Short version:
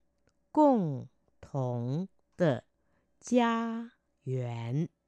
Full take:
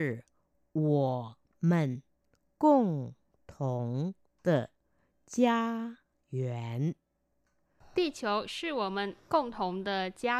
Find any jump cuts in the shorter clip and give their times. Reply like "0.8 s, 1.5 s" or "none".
none